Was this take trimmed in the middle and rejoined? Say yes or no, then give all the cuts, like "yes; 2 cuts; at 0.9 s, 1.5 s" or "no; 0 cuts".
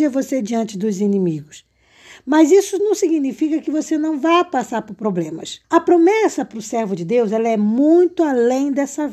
yes; 1 cut; at 5.6 s